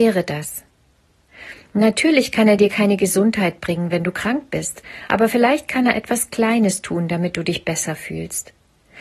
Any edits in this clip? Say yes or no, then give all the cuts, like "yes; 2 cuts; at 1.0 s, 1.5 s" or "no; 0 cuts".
no; 0 cuts